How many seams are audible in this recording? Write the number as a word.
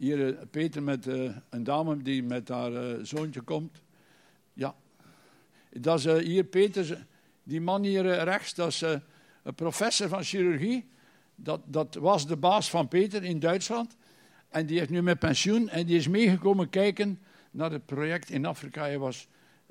zero